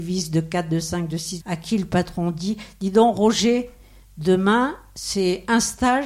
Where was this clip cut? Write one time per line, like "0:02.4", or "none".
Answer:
0:01.4

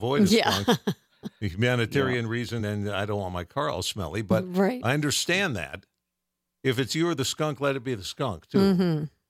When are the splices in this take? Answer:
none

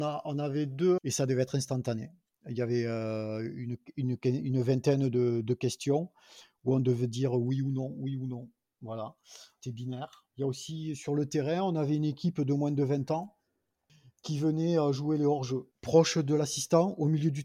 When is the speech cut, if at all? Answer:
0:01.0
0:10.3
0:15.7

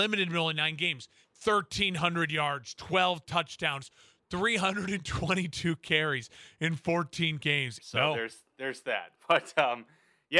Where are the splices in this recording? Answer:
0:01.2
0:07.8

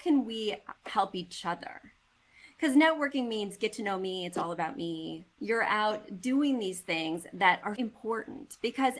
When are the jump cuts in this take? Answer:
0:05.4
0:07.8

